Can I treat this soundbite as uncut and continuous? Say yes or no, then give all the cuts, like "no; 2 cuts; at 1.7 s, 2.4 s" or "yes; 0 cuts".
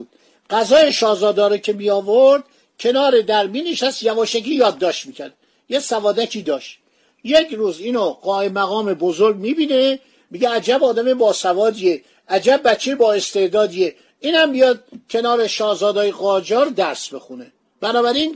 yes; 0 cuts